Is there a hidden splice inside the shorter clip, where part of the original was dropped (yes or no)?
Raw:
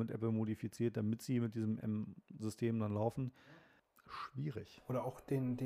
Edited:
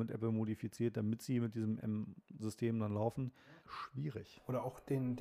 yes